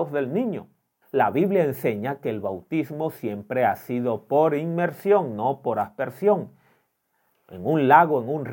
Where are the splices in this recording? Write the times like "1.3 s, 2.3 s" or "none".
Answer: 1.0 s